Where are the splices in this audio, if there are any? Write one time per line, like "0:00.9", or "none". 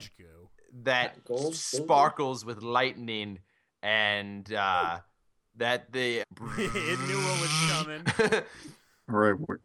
0:06.2